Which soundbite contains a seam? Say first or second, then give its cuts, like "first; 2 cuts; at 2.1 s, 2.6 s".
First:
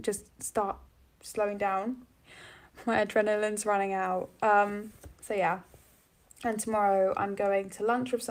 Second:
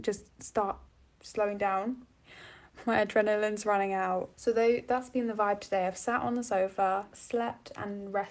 second; 2 cuts; at 4.3 s, 7.1 s